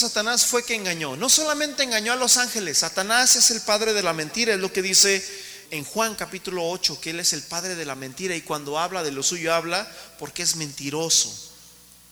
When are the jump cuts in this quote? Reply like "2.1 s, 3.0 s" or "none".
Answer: 5.7 s